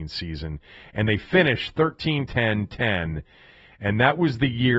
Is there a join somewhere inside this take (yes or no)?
yes